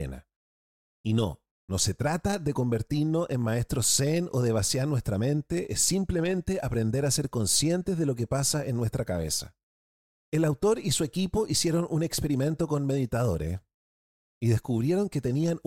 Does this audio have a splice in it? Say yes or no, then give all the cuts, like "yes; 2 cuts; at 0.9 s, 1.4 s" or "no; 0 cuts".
no; 0 cuts